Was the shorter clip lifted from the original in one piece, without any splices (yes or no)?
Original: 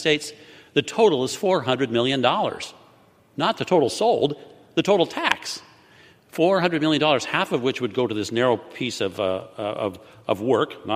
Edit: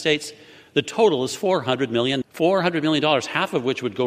no